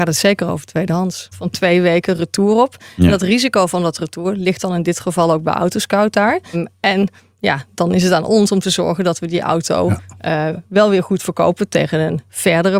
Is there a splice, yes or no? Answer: yes